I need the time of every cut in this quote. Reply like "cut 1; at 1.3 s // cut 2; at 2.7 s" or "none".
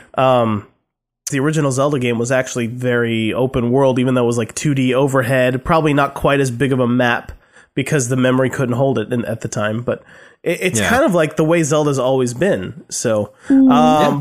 cut 1; at 1.3 s

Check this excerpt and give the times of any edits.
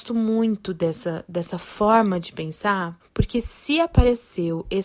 cut 1; at 3.0 s

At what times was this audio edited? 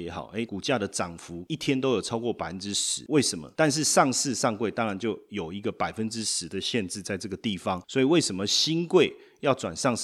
cut 1; at 3.5 s

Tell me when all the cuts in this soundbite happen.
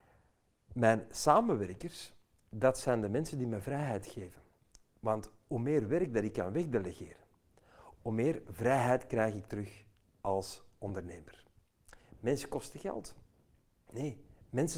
cut 1; at 8.0 s

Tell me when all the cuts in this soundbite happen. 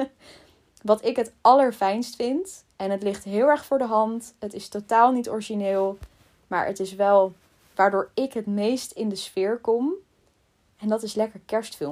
none

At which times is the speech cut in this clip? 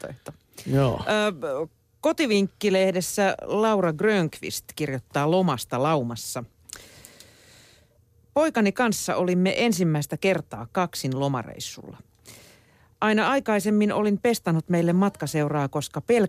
none

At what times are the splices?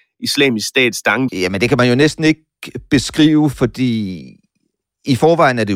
cut 1; at 1.3 s

